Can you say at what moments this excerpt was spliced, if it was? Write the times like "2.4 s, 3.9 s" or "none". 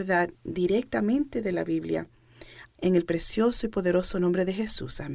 2.6 s